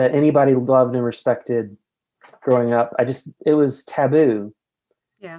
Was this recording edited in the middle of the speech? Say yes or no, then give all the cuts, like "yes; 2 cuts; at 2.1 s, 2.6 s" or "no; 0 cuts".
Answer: no; 0 cuts